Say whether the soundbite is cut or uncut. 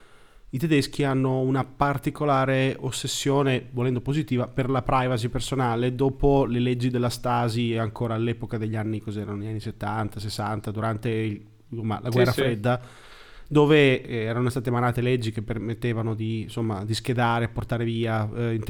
uncut